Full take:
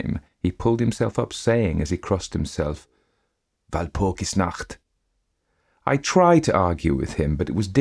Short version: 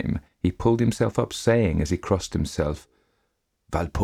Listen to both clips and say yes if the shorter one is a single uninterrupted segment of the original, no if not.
yes